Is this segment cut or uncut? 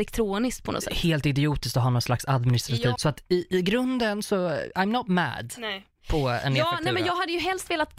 cut